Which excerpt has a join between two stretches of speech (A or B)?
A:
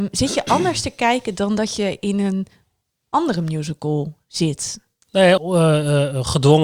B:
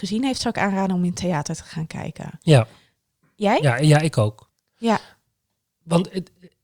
A